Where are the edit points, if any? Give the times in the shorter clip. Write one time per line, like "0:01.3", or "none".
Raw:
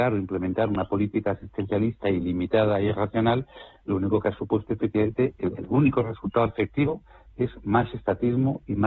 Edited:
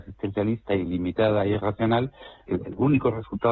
0:02.4